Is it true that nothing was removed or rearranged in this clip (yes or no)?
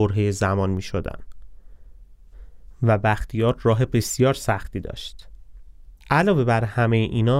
no